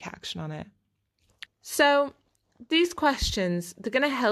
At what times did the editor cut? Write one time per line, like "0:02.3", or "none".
0:01.5